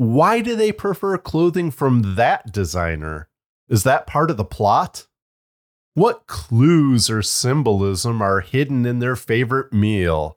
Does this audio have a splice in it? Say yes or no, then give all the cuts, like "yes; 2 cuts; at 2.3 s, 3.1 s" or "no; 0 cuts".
no; 0 cuts